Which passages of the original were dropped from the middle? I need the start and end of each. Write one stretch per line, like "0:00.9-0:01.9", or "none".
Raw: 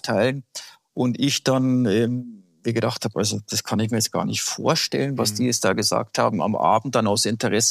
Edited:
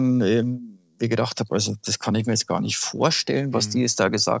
none